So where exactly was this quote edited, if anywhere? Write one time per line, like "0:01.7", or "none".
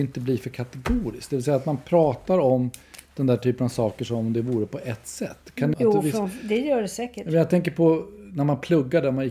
0:05.7